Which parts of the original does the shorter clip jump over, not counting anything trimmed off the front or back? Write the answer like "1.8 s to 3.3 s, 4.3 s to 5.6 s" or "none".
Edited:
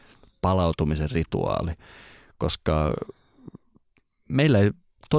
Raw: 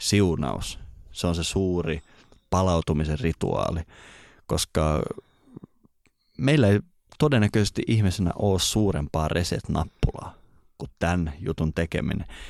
none